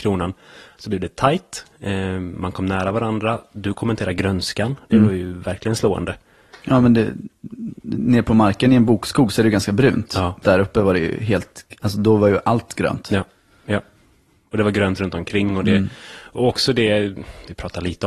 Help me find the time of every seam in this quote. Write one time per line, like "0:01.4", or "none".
0:10.4